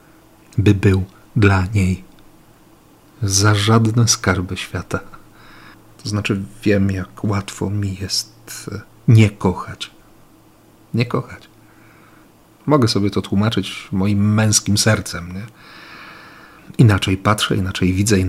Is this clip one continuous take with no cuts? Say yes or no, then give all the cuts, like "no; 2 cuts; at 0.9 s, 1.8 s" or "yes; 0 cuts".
no; 1 cut; at 5.9 s